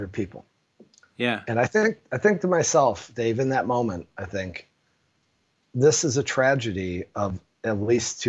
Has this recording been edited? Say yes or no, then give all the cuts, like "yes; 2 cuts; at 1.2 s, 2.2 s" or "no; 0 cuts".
no; 0 cuts